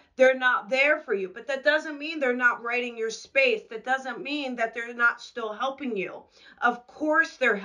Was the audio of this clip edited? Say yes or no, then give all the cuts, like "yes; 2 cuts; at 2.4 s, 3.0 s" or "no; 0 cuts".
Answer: no; 0 cuts